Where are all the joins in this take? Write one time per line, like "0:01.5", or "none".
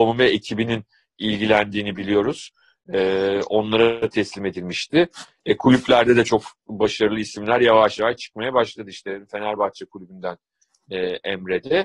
none